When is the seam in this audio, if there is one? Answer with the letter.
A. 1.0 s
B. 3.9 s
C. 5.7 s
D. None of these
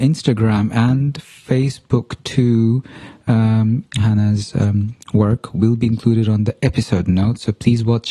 B